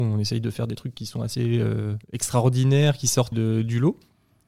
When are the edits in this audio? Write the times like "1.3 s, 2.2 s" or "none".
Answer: 2.0 s, 3.3 s